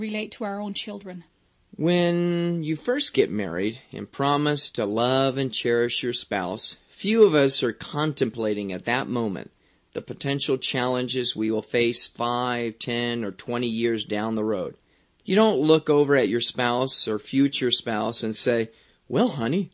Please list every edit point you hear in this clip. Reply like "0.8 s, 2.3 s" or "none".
none